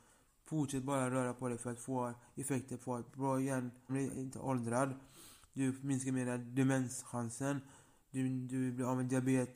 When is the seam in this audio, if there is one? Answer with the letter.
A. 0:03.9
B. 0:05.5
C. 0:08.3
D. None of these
A